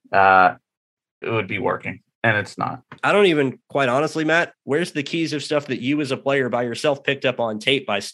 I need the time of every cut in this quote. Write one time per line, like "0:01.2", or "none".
0:01.2
0:03.0
0:04.6

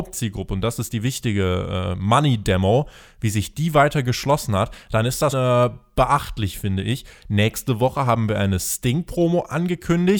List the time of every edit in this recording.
0:05.3
0:07.2

